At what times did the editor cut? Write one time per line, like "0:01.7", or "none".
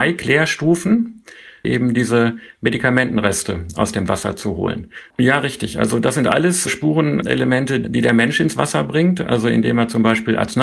0:01.6
0:05.1